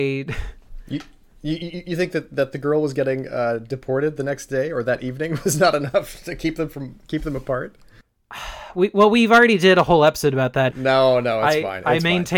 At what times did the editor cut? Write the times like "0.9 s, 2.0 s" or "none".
10.7 s